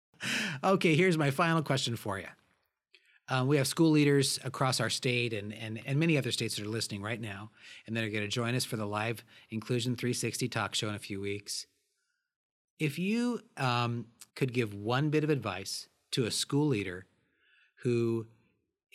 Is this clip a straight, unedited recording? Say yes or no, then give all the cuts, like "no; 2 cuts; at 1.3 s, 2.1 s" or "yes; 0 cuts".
no; 2 cuts; at 5.8 s, 14.3 s